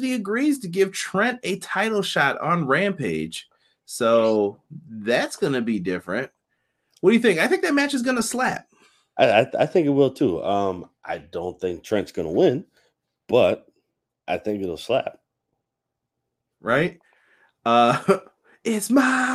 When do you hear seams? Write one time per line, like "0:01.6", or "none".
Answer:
none